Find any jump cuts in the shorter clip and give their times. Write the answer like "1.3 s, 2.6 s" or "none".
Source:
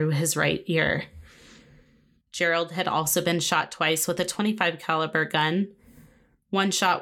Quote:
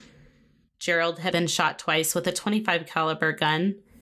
1.3 s